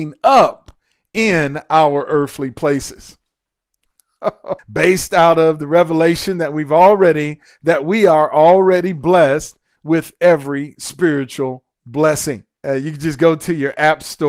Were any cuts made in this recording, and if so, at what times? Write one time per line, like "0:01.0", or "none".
0:04.6
0:12.6

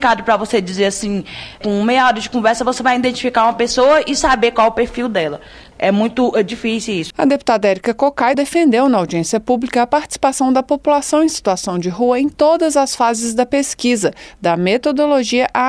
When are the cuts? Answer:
0:07.1
0:08.3

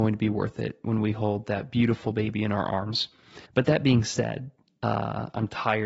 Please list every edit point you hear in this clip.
0:03.5

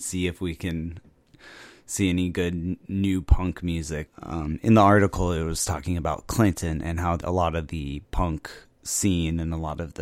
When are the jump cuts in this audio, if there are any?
0:04.1
0:07.2

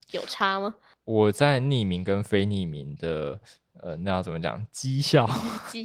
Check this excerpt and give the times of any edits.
none

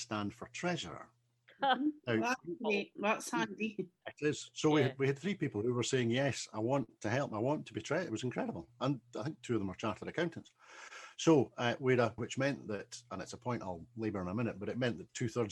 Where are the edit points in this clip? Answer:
0:04.0
0:12.2

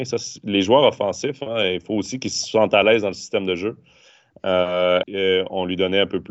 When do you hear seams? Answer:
0:05.0

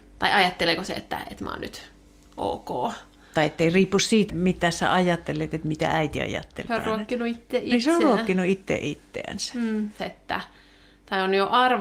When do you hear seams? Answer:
0:04.3
0:06.7
0:10.0

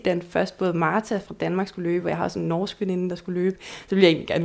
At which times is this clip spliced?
none

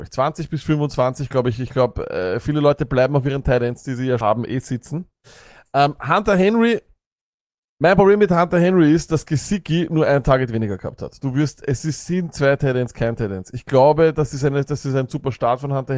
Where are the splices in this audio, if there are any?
0:04.2

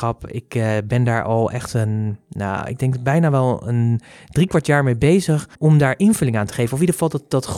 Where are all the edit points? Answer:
0:05.5

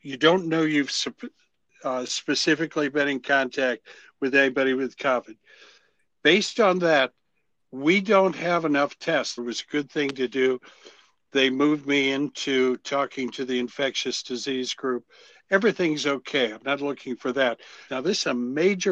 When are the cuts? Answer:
0:09.4
0:17.9

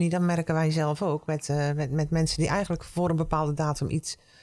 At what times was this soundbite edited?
none

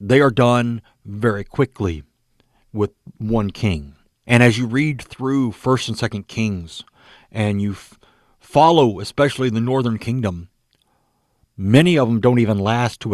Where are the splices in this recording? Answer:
0:04.2

